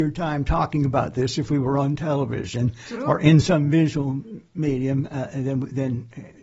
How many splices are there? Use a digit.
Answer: 0